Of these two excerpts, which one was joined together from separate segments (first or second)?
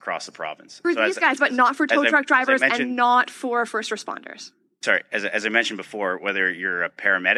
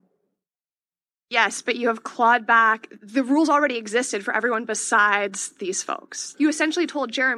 second